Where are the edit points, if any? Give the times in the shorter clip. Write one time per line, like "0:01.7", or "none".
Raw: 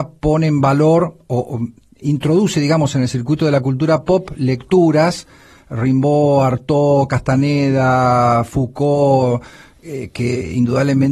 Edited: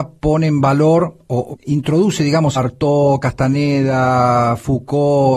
0:01.5
0:02.5